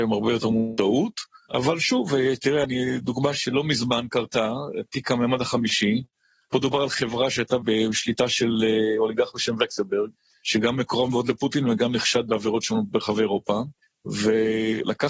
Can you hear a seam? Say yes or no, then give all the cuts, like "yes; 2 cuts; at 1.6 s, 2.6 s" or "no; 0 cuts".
no; 0 cuts